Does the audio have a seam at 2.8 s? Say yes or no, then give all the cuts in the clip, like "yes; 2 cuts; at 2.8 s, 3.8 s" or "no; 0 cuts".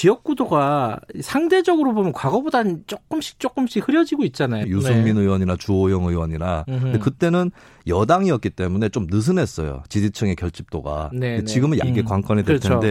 no; 2 cuts; at 4.6 s, 11.8 s